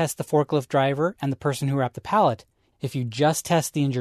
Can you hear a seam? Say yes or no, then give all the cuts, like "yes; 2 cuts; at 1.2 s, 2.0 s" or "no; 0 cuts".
yes; 1 cut; at 2.7 s